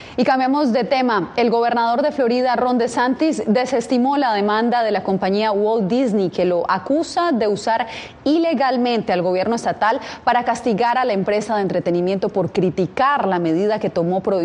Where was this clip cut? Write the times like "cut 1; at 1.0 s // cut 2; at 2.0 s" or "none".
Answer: none